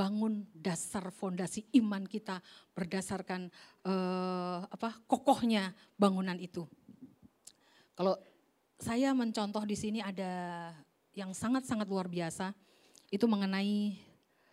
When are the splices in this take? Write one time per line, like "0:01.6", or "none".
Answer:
none